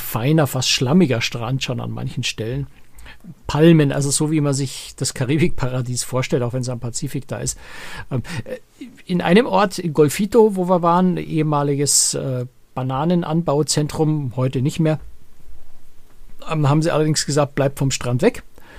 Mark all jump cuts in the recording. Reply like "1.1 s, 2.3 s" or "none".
none